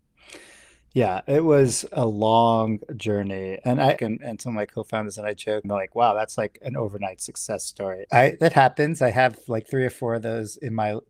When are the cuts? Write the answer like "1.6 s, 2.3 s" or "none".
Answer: 4.0 s, 5.6 s, 8.0 s